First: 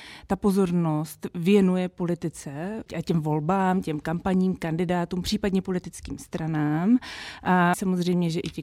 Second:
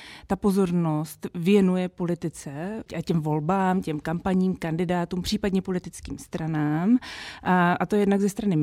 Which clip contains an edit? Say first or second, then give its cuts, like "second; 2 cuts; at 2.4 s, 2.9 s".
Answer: first; 1 cut; at 7.7 s